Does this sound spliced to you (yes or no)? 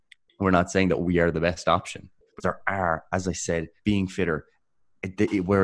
yes